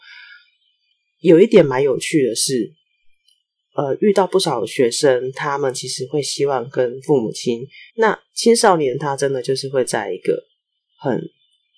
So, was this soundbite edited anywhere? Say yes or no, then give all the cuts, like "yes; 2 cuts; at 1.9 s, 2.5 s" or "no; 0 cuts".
yes; 1 cut; at 7.9 s